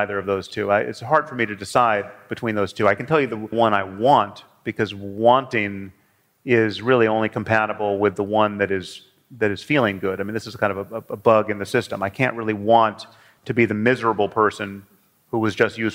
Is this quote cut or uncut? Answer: uncut